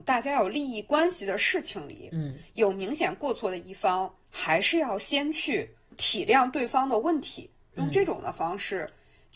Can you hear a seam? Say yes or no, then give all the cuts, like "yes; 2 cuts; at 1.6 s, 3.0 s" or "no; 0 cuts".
yes; 2 cuts; at 4.2 s, 7.7 s